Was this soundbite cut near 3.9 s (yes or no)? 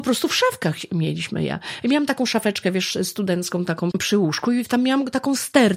yes